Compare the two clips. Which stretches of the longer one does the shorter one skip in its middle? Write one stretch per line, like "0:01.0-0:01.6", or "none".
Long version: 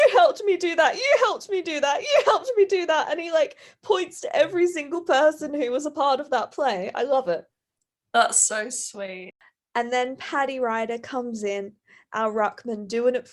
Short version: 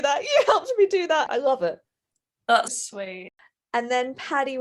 0:03.1-0:06.9
0:08.3-0:08.7